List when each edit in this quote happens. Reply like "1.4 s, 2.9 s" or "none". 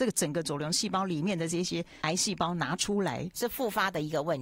2.0 s, 3.4 s